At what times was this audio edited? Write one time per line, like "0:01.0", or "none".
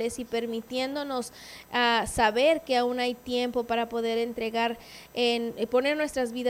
none